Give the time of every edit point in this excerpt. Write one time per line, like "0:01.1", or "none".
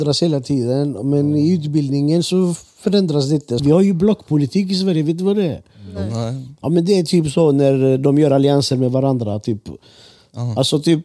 0:03.6